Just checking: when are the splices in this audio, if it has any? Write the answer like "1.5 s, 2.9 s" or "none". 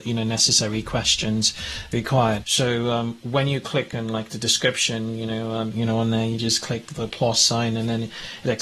2.4 s, 5.7 s